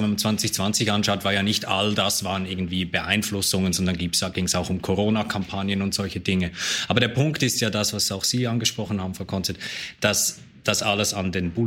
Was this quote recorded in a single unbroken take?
yes; 0 cuts

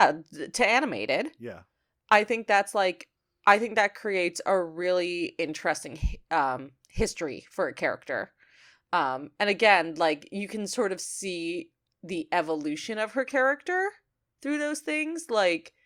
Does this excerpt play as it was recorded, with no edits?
yes; 0 cuts

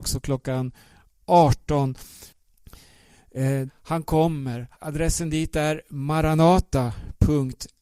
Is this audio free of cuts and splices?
no; 2 cuts; at 3.7 s, 4.7 s

